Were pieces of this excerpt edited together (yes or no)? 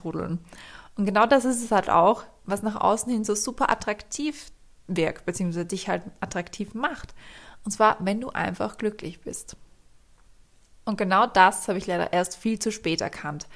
no